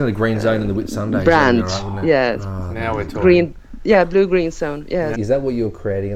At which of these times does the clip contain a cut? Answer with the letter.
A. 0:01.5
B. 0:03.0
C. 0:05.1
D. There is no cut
C